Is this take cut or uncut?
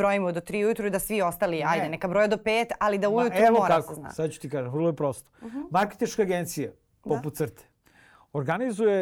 uncut